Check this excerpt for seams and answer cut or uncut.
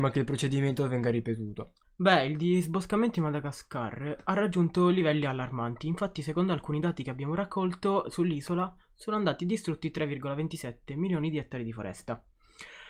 cut